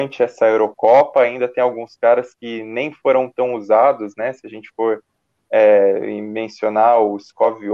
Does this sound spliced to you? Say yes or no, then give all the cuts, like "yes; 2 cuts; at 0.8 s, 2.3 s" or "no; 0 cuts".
no; 0 cuts